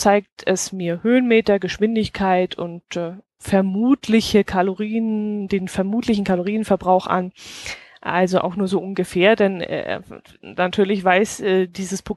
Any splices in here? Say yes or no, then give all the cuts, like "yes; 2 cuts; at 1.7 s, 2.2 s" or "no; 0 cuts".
no; 0 cuts